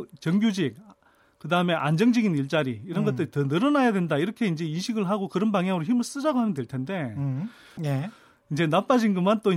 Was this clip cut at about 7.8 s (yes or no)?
yes